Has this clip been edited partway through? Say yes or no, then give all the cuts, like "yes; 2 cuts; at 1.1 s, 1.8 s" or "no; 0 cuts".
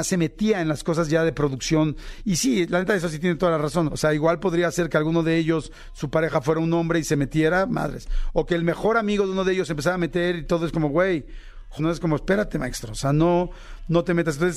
yes; 2 cuts; at 3.9 s, 11.8 s